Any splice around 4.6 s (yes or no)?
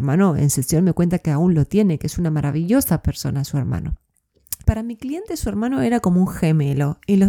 yes